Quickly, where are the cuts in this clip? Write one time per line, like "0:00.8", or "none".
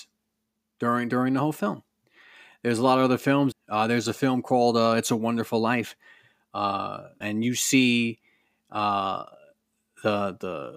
0:03.5
0:07.2